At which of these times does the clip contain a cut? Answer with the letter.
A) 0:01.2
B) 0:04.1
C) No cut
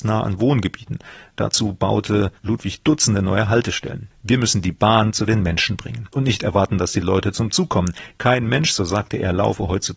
B